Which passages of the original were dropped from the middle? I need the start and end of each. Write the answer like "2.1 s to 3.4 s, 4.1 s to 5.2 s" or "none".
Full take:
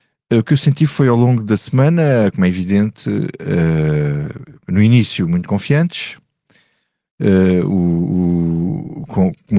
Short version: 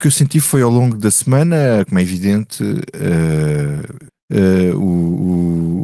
4.6 s to 7.0 s